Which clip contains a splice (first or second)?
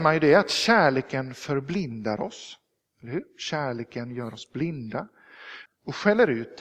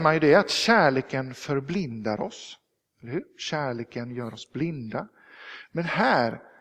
first